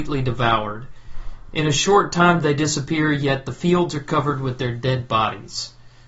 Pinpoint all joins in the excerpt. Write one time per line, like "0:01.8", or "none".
none